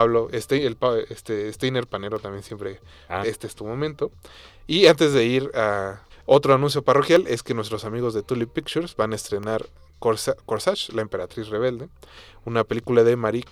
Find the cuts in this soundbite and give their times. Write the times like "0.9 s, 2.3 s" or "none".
3.2 s, 6.1 s